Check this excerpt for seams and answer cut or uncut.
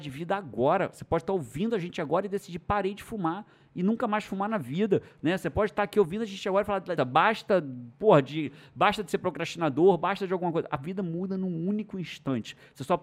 cut